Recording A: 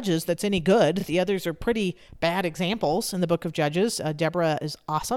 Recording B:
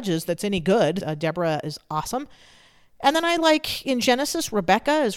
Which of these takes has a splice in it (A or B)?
B